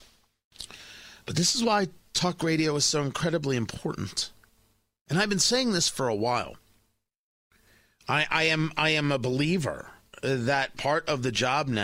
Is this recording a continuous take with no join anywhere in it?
yes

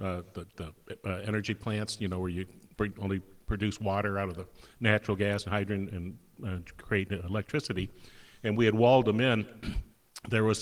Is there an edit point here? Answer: no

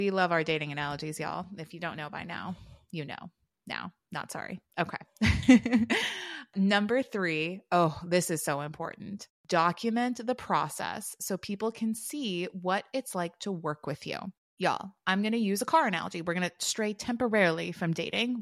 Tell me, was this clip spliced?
no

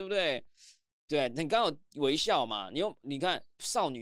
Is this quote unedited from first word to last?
yes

